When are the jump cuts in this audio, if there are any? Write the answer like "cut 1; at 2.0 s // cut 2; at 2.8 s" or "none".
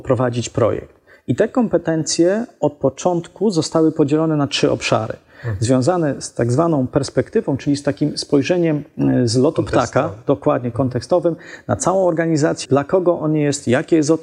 cut 1; at 12.7 s